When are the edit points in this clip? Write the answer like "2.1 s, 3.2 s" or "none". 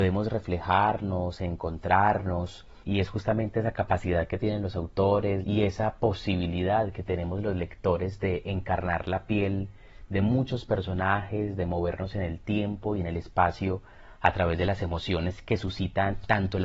2.8 s, 5.4 s

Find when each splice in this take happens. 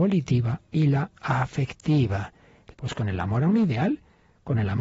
2.7 s

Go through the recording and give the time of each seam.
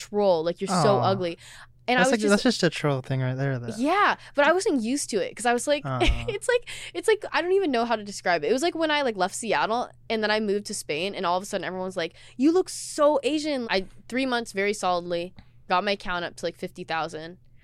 13.6 s

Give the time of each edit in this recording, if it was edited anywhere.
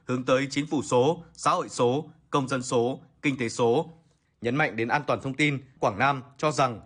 4.3 s, 5.8 s

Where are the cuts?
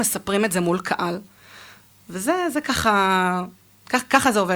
none

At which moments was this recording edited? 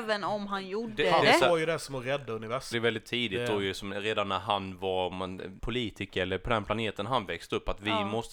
2.7 s, 5.6 s

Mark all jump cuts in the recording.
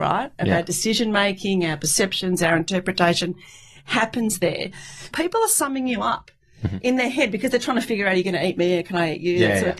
5.1 s

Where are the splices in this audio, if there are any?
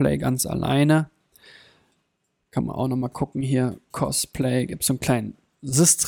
none

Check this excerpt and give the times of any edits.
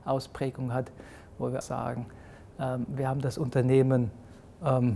1.6 s

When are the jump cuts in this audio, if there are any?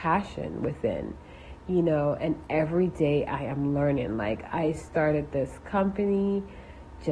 none

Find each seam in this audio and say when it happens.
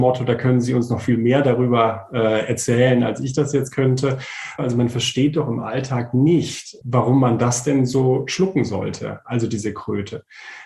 4.6 s, 6.8 s

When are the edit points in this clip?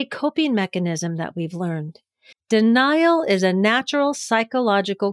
2.3 s

